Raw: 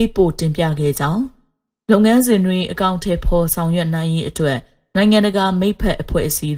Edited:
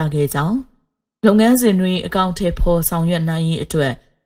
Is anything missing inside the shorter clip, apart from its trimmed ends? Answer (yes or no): no